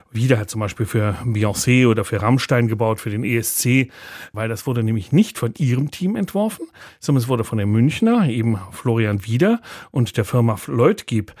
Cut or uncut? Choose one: cut